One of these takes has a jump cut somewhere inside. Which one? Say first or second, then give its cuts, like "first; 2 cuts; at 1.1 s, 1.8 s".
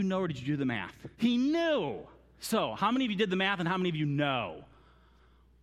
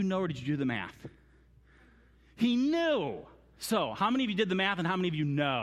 first; 1 cut; at 1.1 s